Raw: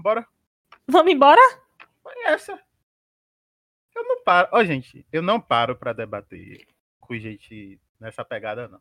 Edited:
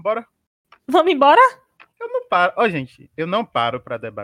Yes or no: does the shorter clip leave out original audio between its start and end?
yes